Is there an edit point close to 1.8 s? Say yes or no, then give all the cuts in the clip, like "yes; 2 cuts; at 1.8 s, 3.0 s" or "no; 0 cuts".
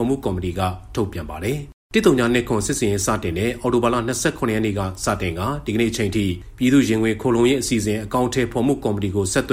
yes; 1 cut; at 1.8 s